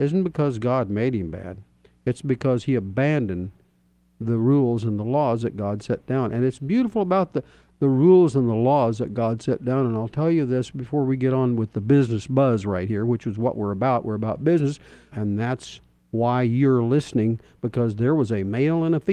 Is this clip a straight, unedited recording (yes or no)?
no